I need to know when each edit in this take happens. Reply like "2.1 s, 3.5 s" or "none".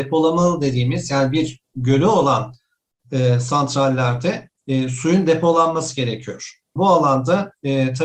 6.8 s